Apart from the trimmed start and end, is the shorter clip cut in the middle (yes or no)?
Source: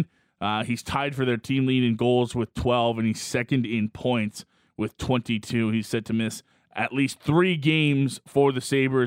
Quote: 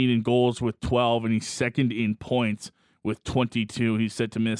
no